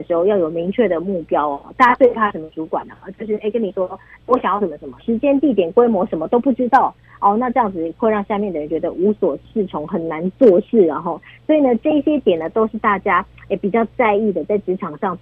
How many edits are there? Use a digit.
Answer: 1